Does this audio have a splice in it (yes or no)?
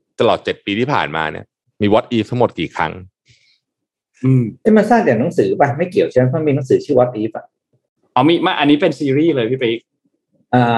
no